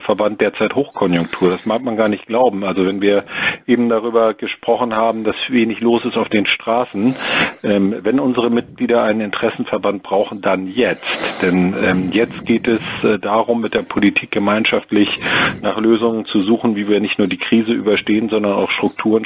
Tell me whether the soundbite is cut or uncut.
uncut